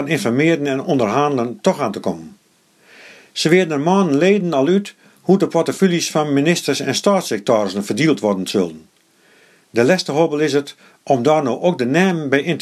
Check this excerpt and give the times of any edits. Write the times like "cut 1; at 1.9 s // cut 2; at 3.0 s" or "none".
none